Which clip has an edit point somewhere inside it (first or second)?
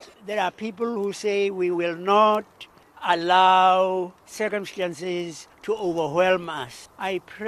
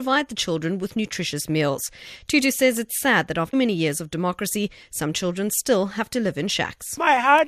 second